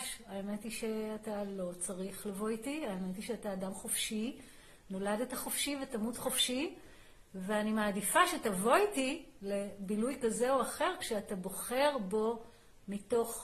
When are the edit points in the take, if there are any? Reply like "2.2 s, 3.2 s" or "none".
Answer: none